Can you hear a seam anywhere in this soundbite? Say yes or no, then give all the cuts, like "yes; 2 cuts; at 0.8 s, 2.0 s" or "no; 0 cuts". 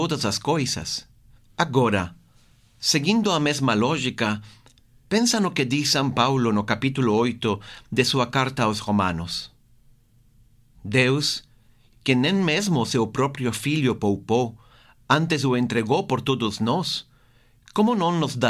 yes; 1 cut; at 1.4 s